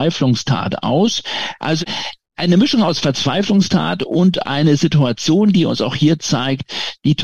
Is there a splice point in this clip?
yes; 1 cut; at 1.6 s

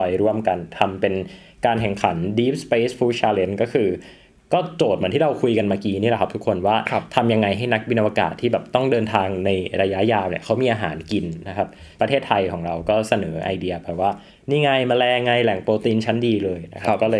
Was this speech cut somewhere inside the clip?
no; 0 cuts

